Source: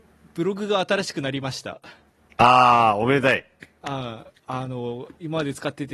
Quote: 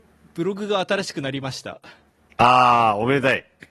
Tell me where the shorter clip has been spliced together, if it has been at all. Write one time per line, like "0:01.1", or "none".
none